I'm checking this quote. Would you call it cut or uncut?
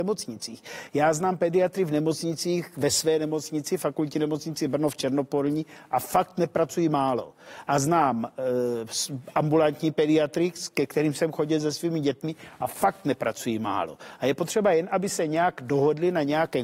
uncut